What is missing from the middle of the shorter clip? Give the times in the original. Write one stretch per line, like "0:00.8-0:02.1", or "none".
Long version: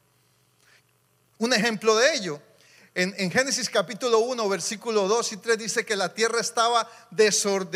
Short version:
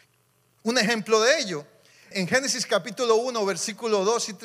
0:02.9-0:03.1